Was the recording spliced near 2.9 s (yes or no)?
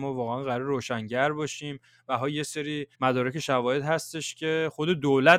yes